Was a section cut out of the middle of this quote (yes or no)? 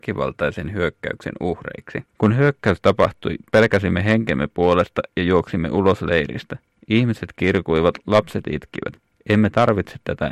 yes